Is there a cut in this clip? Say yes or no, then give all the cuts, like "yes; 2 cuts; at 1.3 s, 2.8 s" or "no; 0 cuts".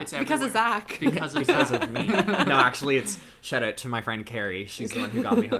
no; 0 cuts